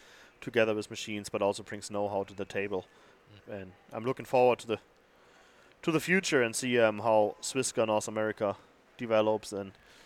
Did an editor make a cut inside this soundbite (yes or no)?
yes